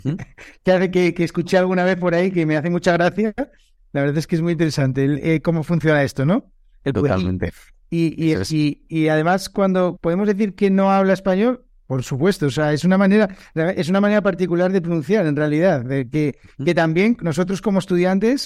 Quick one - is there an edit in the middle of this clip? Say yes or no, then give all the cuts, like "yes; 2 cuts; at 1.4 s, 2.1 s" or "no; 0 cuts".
yes; 1 cut; at 10.0 s